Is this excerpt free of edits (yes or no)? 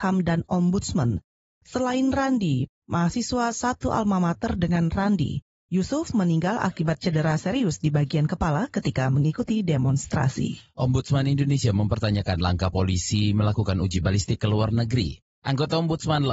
no